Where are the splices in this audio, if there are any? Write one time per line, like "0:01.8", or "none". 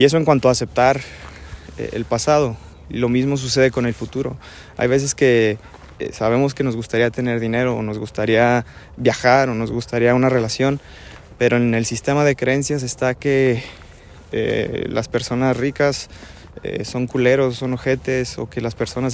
none